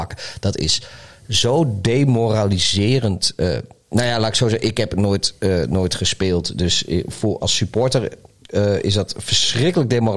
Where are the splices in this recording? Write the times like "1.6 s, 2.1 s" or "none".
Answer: 7.4 s

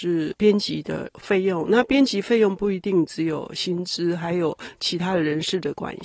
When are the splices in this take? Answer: none

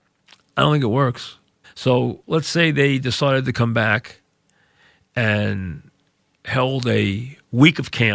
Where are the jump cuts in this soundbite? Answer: 1.6 s

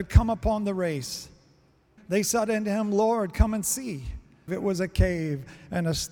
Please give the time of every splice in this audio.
2.0 s, 4.5 s

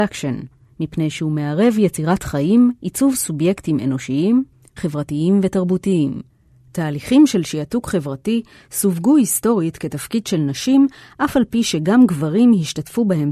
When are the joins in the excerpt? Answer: 4.8 s

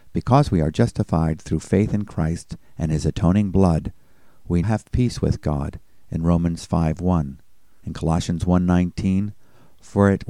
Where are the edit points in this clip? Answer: 4.6 s, 7.8 s

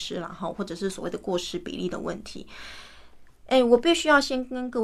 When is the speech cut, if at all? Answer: none

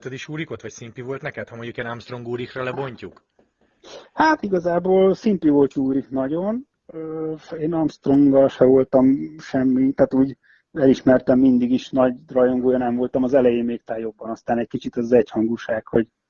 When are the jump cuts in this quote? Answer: none

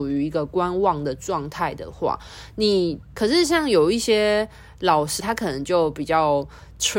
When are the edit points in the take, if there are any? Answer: 3.1 s, 5.2 s

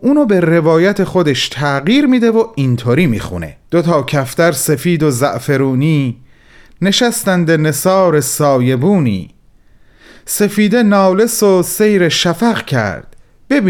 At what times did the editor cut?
3.7 s

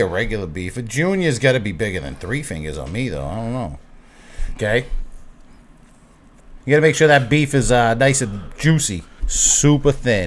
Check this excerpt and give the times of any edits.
4.6 s, 6.6 s, 9.2 s

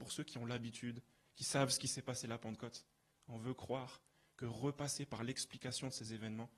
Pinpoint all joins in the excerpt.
1.2 s

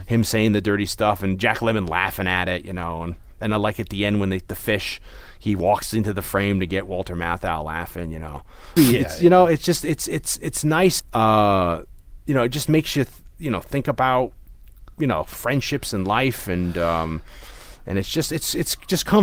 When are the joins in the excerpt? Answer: 8.8 s, 11.0 s

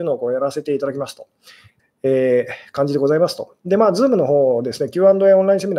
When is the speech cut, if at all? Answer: 1.8 s

